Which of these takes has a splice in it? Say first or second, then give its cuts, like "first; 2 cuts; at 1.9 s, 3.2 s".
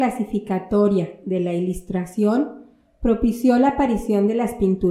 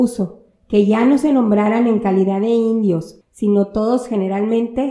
second; 1 cut; at 3.2 s